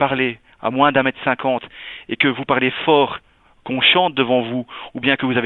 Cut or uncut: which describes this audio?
uncut